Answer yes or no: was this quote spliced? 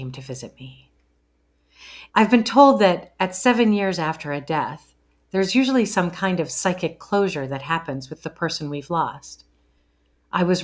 yes